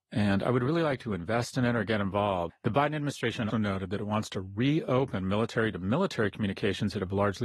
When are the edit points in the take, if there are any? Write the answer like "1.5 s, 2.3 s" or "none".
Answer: 2.5 s, 3.5 s